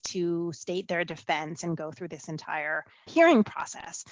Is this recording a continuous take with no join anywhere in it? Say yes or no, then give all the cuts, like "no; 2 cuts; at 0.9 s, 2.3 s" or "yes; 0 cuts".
no; 1 cut; at 3.1 s